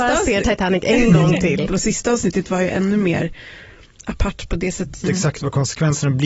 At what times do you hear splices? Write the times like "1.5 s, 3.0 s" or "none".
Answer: 1.7 s, 5.0 s

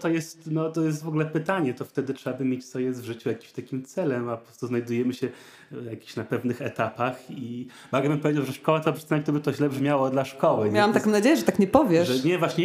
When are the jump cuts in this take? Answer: none

